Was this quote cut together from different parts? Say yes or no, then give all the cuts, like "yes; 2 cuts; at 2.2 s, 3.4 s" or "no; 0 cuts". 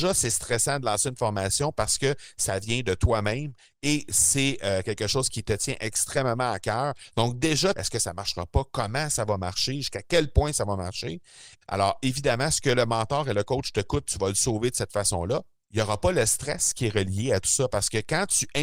yes; 3 cuts; at 7.7 s, 11.6 s, 15.6 s